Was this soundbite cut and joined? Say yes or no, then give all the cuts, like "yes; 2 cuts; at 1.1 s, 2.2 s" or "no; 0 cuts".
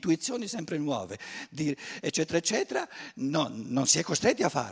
no; 0 cuts